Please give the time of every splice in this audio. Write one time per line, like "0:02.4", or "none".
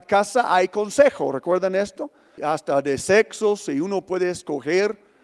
0:02.4